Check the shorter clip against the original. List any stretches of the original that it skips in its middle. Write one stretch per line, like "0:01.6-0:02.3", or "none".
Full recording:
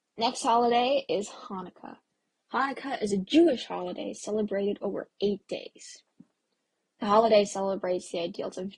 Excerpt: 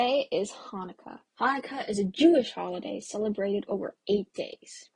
0:02.0-0:02.4